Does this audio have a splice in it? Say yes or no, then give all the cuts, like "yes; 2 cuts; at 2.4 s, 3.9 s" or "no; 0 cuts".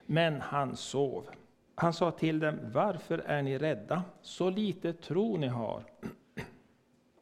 yes; 1 cut; at 1.7 s